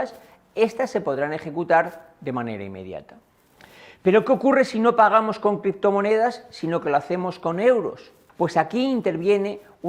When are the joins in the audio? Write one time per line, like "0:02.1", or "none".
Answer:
0:08.3